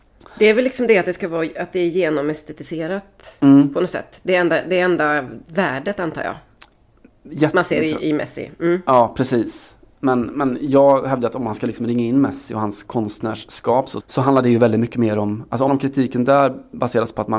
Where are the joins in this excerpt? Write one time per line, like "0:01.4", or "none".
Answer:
0:14.0
0:15.7